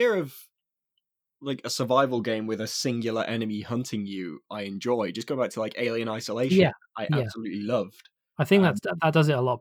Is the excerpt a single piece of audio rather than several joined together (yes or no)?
yes